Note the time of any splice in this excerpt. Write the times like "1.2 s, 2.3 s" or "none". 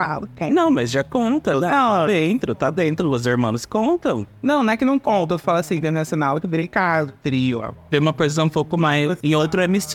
6.4 s, 7.9 s